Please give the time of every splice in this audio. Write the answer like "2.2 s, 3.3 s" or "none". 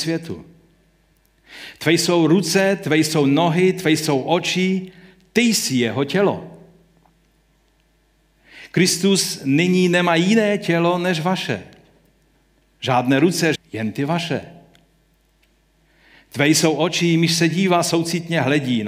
13.5 s